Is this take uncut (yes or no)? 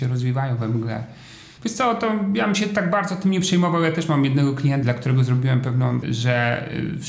no